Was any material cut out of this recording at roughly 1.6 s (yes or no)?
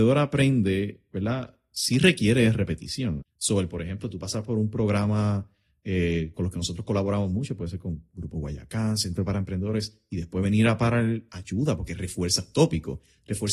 no